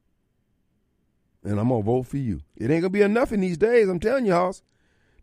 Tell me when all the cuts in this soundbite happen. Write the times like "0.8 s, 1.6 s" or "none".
2.5 s